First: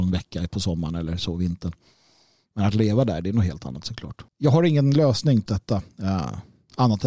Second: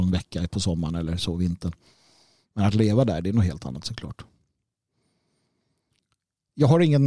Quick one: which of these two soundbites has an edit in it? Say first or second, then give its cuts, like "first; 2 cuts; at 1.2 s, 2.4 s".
first; 2 cuts; at 4.3 s, 5.5 s